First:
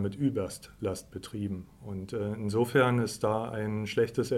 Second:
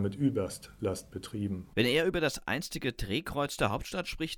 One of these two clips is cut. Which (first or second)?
second